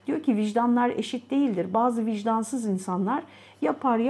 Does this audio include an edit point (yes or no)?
no